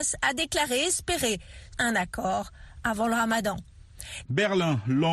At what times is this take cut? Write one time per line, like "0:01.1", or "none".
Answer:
0:01.7
0:04.2